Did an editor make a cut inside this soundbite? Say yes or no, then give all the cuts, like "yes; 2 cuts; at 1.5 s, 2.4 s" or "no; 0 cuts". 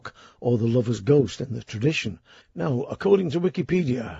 yes; 1 cut; at 2.4 s